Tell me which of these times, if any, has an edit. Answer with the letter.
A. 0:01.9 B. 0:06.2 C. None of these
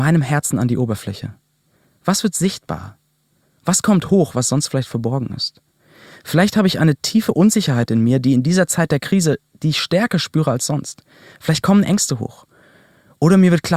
C